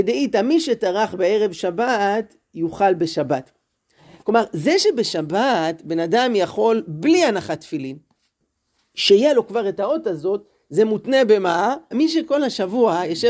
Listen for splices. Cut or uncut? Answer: cut